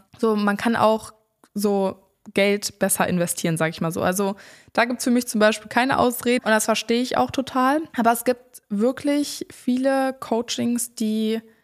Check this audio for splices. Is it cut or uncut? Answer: cut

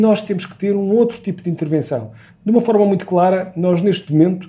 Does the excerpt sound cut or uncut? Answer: uncut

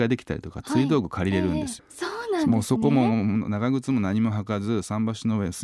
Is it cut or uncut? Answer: cut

